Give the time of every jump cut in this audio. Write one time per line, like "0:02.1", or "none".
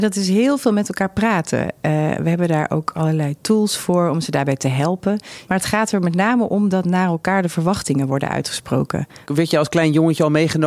0:05.5
0:09.3